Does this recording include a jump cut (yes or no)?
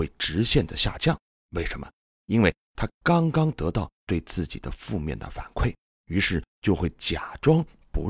no